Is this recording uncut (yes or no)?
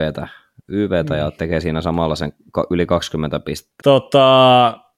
no